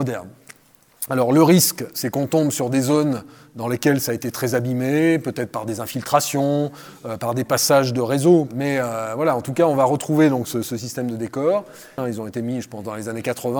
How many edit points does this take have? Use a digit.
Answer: 1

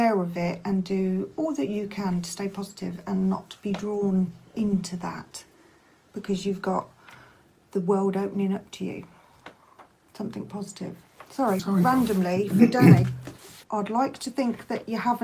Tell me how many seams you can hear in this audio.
2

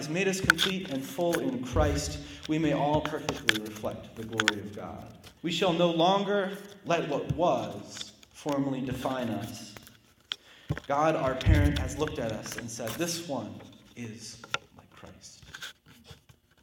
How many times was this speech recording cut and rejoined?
1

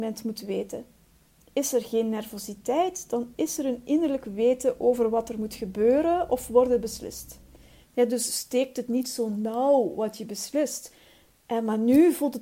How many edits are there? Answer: 1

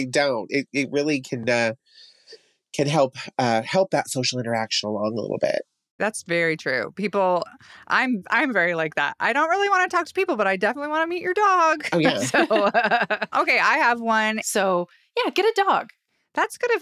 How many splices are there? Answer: 2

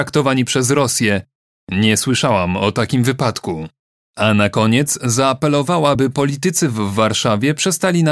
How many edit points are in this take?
0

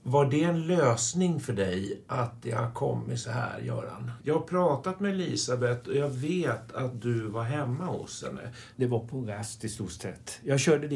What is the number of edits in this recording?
2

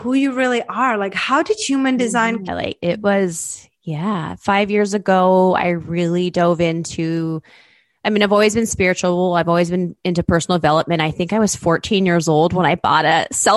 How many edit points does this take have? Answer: 1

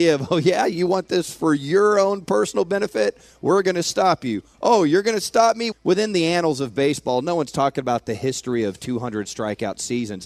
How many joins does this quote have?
1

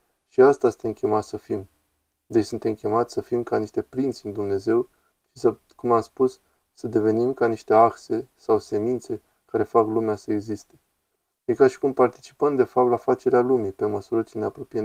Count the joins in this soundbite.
0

